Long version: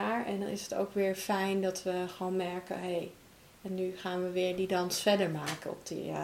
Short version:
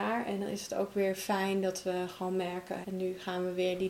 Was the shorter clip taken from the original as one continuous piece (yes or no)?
no